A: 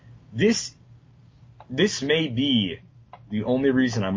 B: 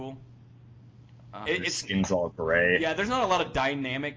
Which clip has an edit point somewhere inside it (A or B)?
B